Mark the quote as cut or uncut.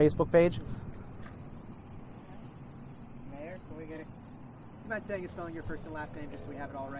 uncut